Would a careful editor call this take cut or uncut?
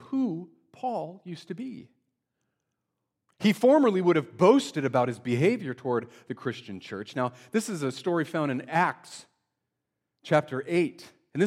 uncut